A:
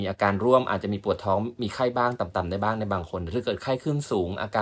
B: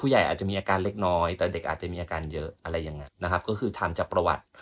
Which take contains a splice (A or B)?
B